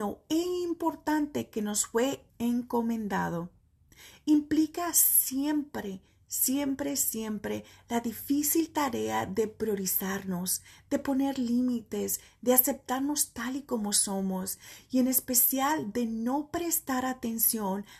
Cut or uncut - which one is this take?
cut